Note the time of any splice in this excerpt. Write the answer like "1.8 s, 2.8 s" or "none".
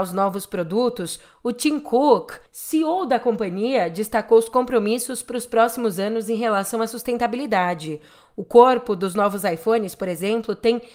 none